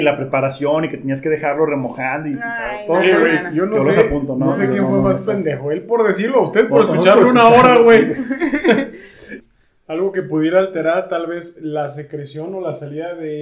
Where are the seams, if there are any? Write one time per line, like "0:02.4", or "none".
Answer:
0:09.4

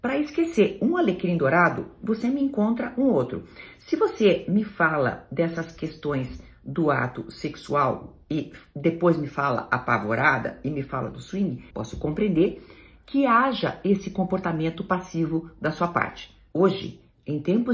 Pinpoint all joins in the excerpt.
0:11.7
0:16.5

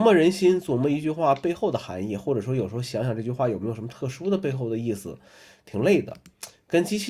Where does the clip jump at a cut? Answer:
none

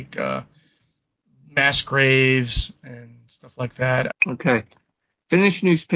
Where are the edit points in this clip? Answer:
0:04.1

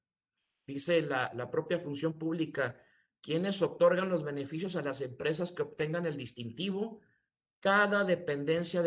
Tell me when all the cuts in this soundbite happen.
none

